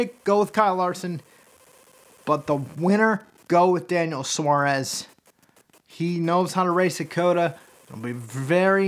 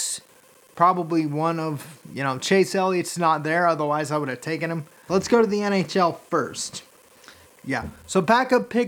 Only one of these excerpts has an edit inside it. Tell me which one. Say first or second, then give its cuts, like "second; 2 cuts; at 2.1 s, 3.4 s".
second; 2 cuts; at 5.1 s, 7.4 s